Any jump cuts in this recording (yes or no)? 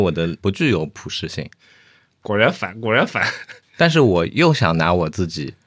yes